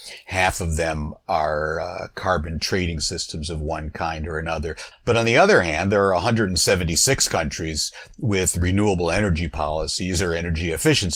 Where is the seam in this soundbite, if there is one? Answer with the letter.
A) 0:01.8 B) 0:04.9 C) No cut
B